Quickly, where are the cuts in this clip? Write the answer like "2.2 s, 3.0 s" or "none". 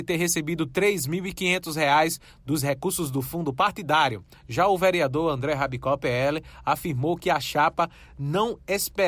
4.3 s